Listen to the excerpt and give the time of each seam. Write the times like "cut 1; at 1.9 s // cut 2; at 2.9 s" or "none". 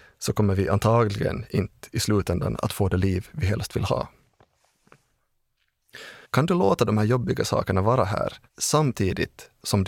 cut 1; at 6.2 s // cut 2; at 8.5 s